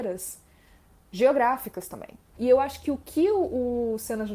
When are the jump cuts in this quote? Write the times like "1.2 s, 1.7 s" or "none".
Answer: 2.3 s